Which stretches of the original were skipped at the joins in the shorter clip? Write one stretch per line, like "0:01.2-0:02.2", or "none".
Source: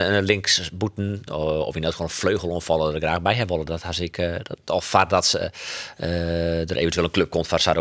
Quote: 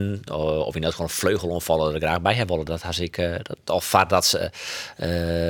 none